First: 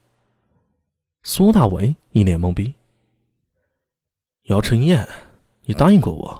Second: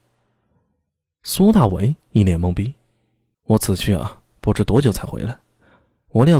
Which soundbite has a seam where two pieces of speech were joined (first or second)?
second